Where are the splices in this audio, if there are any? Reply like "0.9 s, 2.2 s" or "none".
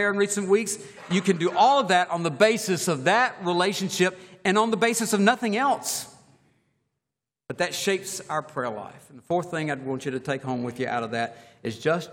none